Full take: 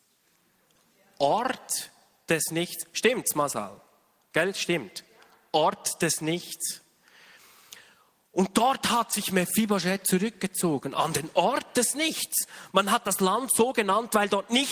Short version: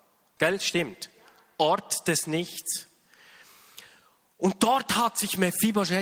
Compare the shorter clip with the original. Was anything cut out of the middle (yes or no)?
no